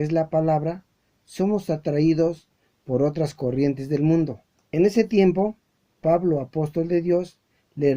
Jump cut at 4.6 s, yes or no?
yes